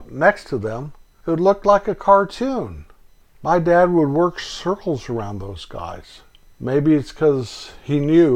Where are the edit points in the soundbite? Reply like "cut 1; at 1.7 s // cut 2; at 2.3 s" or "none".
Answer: none